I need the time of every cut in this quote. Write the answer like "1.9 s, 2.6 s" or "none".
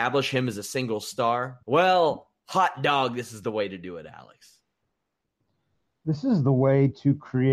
1.6 s